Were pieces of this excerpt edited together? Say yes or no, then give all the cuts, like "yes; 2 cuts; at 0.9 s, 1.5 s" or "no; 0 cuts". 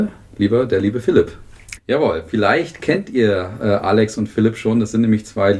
yes; 1 cut; at 1.8 s